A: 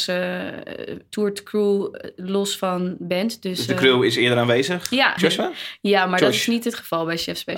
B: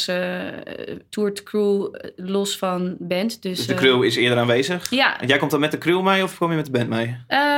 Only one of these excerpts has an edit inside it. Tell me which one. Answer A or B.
A